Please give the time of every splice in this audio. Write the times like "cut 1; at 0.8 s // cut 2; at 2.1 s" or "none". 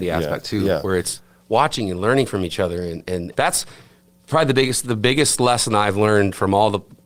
cut 1; at 3.3 s